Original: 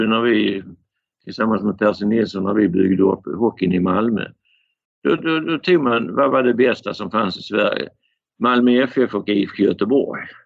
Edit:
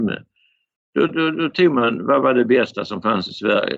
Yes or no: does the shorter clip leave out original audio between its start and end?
no